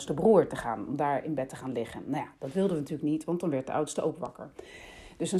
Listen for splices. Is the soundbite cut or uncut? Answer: uncut